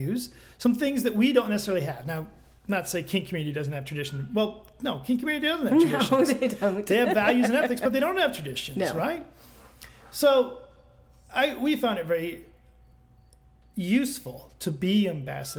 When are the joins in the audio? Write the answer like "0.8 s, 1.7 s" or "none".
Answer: none